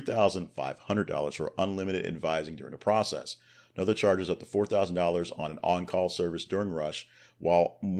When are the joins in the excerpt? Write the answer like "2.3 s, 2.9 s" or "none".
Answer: none